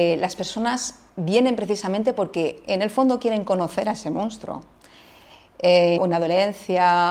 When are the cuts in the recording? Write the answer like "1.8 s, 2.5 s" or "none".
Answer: 6.0 s